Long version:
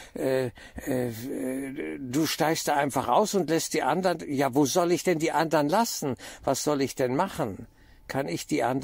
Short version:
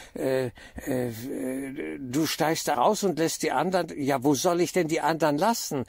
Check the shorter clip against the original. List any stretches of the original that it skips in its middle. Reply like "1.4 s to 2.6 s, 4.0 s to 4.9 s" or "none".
2.7 s to 3.1 s